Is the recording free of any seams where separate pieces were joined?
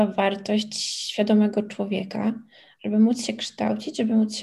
yes; 0 cuts

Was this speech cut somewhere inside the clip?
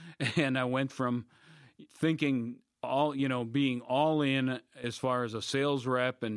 yes; 1 cut; at 1.9 s

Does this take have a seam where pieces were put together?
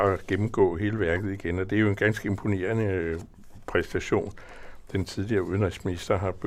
no; 0 cuts

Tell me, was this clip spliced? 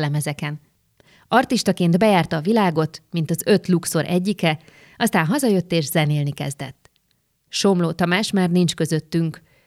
no; 0 cuts

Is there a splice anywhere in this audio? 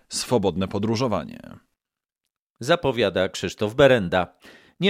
no; 0 cuts

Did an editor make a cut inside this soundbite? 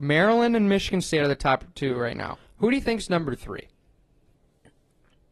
no; 0 cuts

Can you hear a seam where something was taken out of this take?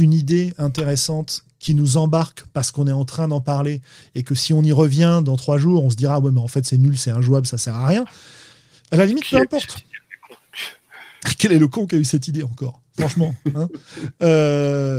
no; 0 cuts

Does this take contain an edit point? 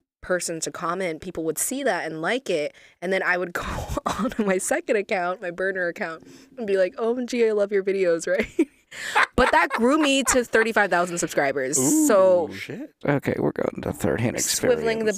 yes; 1 cut; at 13.0 s

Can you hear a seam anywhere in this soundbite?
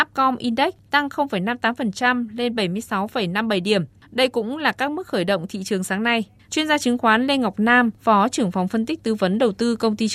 yes; 1 cut; at 6.4 s

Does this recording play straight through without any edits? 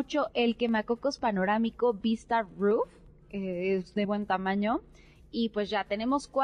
no; 1 cut; at 4.0 s

